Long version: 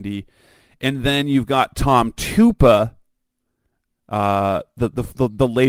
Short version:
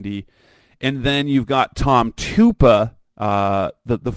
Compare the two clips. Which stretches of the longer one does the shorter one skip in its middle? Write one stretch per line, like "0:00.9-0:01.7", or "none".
0:03.0-0:04.0